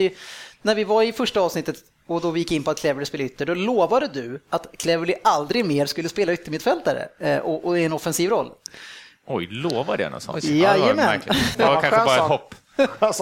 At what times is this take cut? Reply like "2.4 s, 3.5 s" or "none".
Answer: 11.5 s